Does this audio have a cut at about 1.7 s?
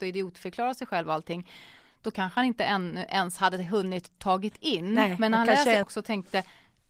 no; 1 cut; at 5.8 s

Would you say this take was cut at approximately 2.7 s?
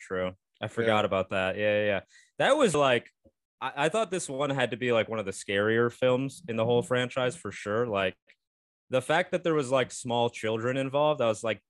yes; 1 cut; at 2.7 s

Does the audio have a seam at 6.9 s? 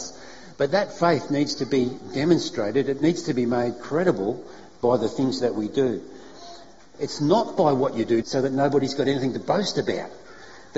yes; 2 cuts; at 6.9 s, 8.2 s

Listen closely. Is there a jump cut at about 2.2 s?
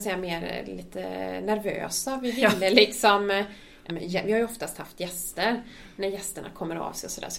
no; 1 cut; at 3.9 s

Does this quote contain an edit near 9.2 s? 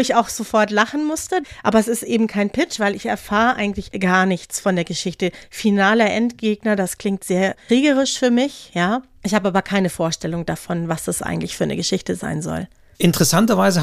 no; 1 cut; at 1.6 s

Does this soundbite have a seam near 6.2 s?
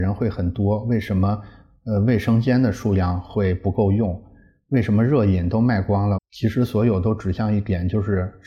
yes; 1 cut; at 6.2 s

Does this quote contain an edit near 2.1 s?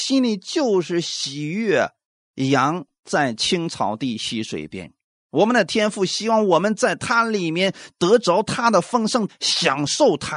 no; 1 cut; at 9.3 s

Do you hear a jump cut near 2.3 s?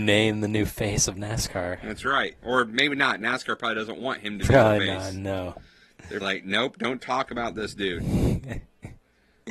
no; 1 cut; at 6.2 s

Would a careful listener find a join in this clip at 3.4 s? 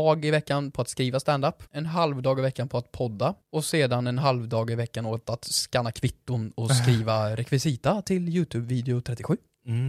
yes; 2 cuts; at 1.7 s, 3.4 s

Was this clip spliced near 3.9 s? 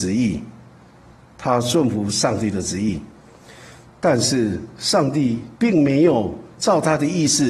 yes; 2 cuts; at 3.9 s, 5.5 s

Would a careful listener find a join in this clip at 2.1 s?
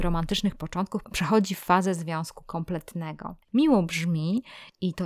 no; 1 cut; at 3.5 s

